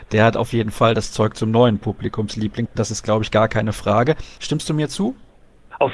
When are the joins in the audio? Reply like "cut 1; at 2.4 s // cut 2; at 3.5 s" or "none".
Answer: cut 1; at 4.4 s